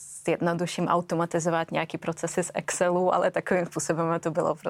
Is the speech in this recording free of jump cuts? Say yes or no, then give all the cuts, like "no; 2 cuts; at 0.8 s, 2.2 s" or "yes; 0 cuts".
yes; 0 cuts